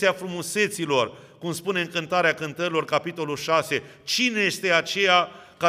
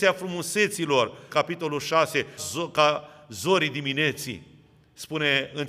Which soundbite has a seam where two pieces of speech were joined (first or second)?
second